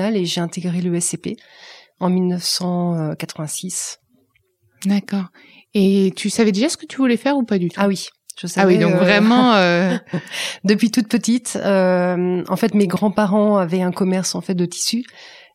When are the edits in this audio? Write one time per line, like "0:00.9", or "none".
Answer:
none